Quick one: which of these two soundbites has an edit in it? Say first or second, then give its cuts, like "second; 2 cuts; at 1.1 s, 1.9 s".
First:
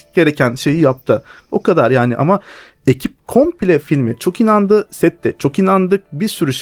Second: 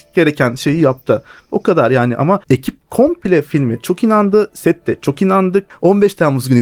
second; 2 cuts; at 2.4 s, 5.7 s